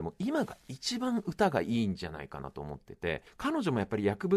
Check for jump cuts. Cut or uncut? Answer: cut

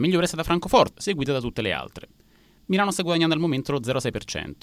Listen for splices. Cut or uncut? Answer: cut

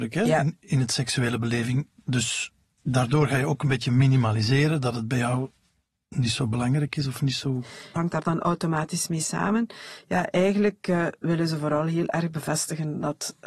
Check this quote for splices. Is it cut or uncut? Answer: cut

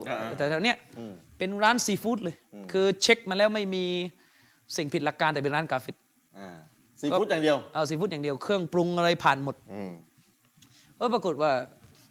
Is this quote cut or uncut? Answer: uncut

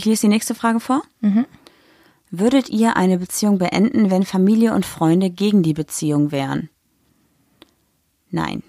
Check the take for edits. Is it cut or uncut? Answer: uncut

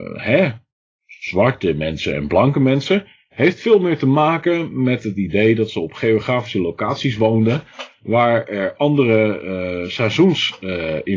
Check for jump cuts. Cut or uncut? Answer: uncut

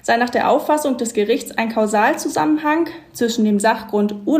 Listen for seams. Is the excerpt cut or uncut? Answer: uncut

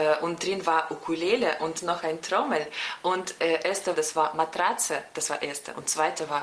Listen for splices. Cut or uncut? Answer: cut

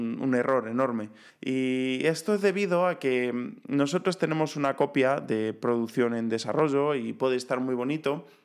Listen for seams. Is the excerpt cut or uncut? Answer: cut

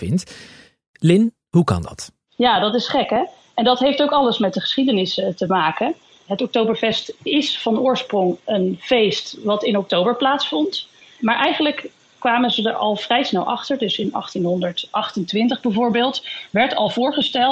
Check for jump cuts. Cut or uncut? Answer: uncut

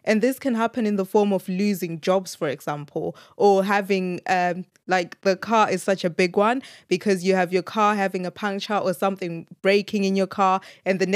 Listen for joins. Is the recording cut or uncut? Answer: cut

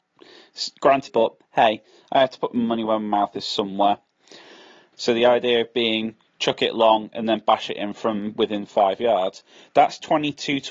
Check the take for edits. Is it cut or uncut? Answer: cut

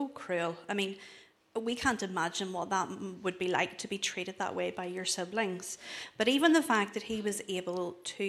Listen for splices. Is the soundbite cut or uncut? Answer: uncut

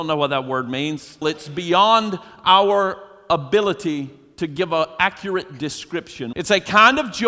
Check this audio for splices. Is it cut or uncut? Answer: cut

